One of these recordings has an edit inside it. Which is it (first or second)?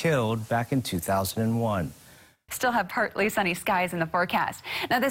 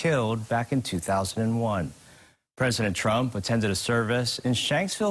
first